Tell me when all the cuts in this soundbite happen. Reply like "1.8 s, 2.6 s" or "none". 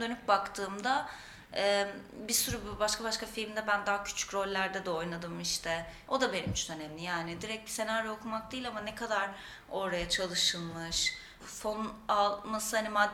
6.1 s, 11.4 s